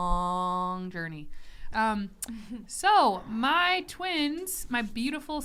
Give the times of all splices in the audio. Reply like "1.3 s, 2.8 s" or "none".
1.7 s